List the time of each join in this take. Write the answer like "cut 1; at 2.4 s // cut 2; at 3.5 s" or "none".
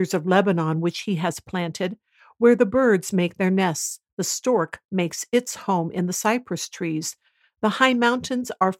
none